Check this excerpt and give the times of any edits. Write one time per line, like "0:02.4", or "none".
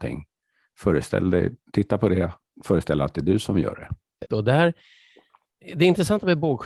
0:04.3